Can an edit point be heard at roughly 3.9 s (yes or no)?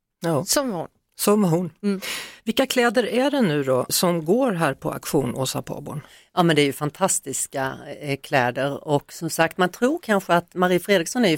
yes